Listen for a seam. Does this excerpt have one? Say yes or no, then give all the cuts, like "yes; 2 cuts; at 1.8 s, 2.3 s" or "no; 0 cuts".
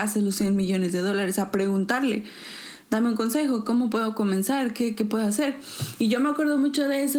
no; 0 cuts